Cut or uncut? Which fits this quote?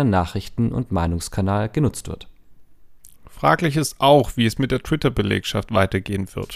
uncut